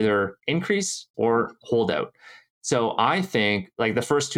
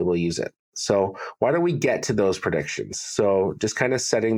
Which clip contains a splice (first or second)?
first